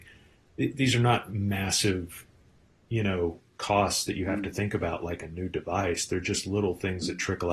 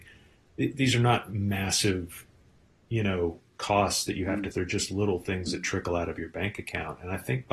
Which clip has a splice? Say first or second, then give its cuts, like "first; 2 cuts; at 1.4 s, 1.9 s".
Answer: second; 1 cut; at 4.5 s